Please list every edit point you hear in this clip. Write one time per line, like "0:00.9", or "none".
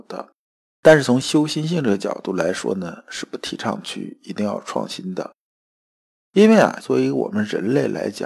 0:06.8